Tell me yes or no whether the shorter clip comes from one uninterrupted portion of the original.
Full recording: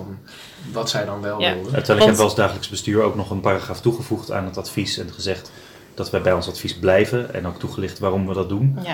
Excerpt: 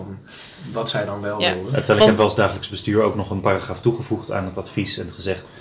yes